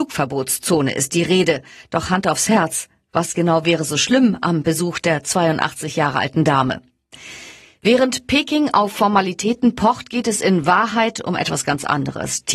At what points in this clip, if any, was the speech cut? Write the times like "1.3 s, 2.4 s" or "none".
none